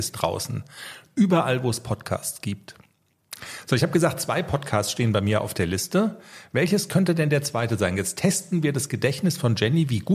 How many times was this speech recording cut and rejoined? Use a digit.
0